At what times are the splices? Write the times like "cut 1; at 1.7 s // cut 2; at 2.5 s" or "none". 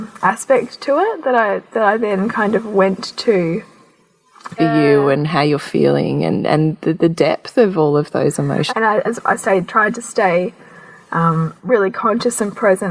cut 1; at 4.6 s // cut 2; at 8.7 s